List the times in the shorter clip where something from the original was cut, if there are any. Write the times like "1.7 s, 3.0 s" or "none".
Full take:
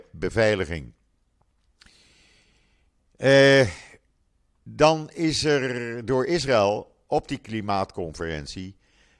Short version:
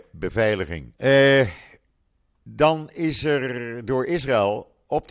1.0 s